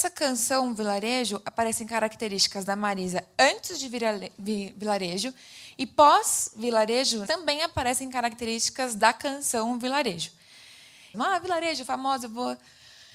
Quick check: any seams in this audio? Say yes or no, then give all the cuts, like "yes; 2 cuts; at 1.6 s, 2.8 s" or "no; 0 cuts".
yes; 2 cuts; at 7.3 s, 11.1 s